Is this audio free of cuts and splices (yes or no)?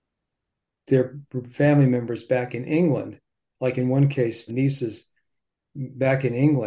no